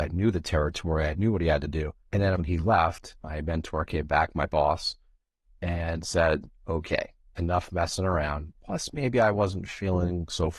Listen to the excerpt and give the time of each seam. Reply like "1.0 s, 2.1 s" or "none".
2.3 s, 8.5 s